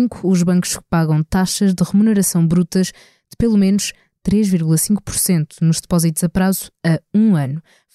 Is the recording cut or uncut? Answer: uncut